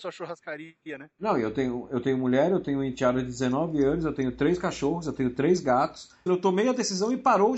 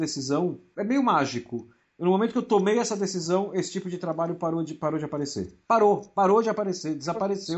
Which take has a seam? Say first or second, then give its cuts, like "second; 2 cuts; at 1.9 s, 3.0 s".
first; 1 cut; at 6.3 s